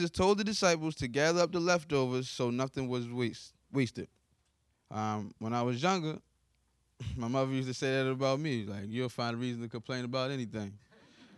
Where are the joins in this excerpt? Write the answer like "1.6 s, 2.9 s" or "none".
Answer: 4.7 s